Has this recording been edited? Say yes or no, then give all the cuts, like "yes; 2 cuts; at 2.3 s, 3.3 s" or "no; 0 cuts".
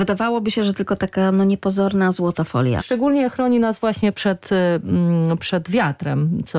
yes; 1 cut; at 2.8 s